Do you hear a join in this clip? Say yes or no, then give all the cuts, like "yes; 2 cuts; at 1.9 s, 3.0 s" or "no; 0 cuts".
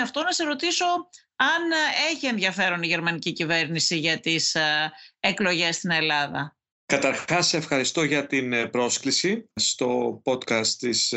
no; 0 cuts